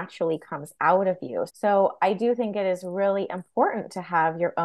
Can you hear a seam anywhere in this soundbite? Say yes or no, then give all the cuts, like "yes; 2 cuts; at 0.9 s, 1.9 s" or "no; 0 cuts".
yes; 1 cut; at 1.5 s